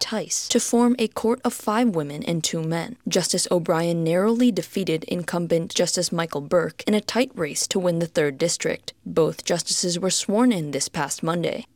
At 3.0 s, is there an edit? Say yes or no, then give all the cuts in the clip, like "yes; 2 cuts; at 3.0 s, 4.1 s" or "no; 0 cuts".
no; 1 cut; at 9.0 s